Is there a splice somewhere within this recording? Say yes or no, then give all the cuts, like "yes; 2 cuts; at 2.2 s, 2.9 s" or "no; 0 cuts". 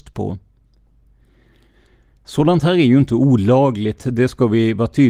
no; 0 cuts